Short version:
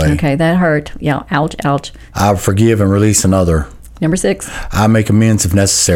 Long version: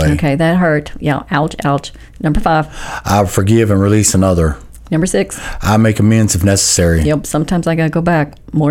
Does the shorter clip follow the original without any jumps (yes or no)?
no